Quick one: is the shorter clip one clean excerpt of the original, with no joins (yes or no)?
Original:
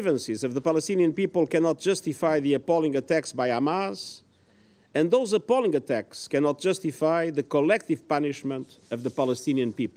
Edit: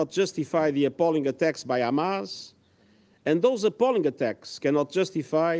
yes